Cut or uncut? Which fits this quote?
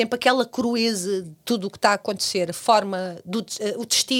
cut